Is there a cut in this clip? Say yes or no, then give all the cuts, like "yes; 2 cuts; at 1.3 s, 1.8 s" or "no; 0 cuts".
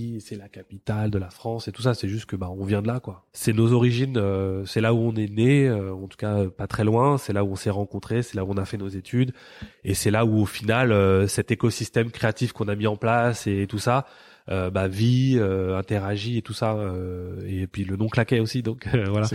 no; 0 cuts